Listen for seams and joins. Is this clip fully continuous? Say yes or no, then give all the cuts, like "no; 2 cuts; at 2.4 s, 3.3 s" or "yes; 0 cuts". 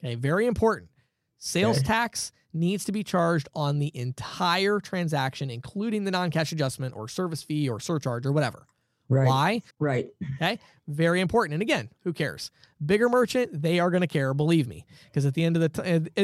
no; 2 cuts; at 9.7 s, 12.0 s